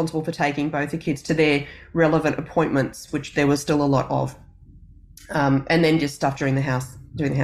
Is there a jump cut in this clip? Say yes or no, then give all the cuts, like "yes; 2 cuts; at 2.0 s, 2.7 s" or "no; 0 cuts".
no; 0 cuts